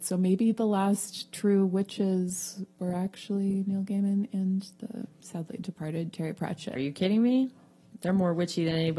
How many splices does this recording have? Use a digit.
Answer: 1